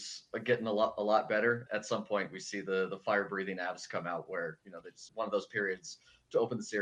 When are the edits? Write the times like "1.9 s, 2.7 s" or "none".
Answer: 1.7 s, 5.1 s